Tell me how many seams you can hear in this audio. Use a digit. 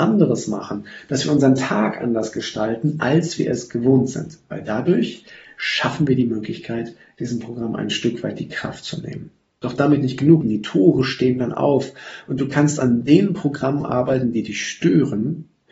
1